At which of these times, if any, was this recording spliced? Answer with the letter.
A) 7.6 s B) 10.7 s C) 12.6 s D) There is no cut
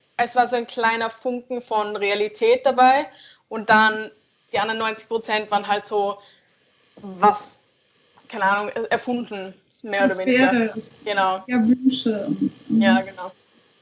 B